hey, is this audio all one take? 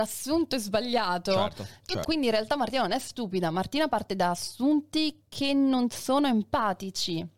no; 1 cut; at 2.0 s

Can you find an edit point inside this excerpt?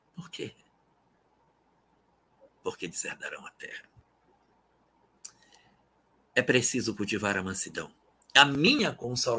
yes; 1 cut; at 8.2 s

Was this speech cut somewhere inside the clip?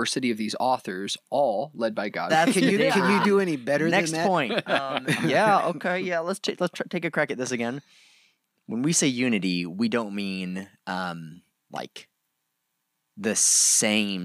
yes; 1 cut; at 2.3 s

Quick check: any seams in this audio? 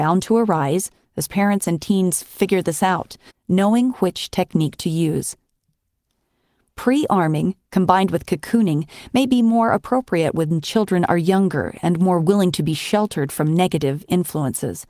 yes; 1 cut; at 3.3 s

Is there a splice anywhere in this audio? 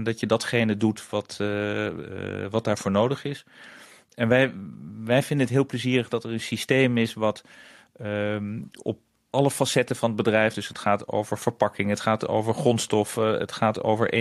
no; 0 cuts

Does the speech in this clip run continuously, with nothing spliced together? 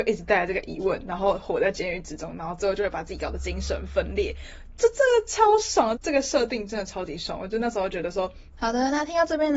no; 2 cuts; at 6.0 s, 8.5 s

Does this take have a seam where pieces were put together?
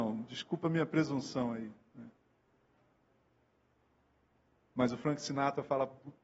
no; 0 cuts

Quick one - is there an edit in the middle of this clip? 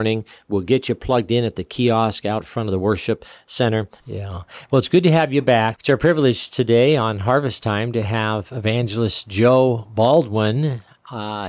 yes; 2 cuts; at 4.0 s, 5.8 s

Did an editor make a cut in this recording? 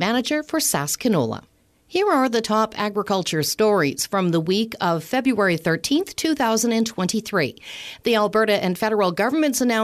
no; 0 cuts

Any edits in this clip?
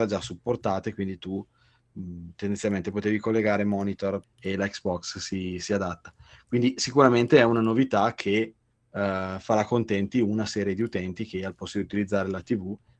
yes; 1 cut; at 4.2 s

